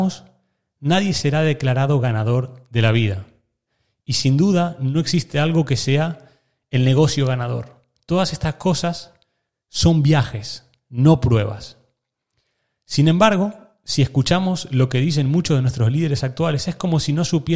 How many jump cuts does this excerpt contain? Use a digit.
0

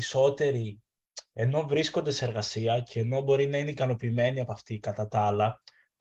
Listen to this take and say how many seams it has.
0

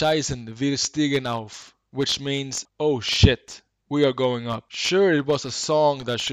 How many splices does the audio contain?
1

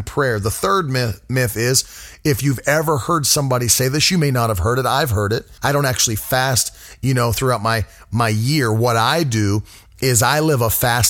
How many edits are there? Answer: 1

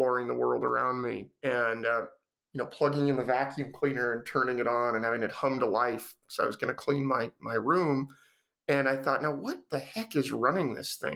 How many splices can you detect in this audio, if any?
1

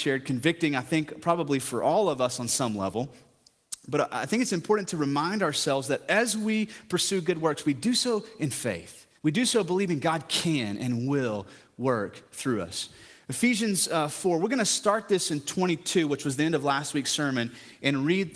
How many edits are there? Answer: 1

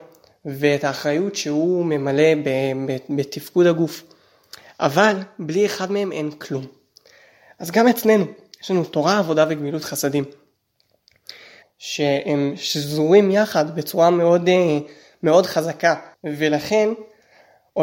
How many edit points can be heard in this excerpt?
2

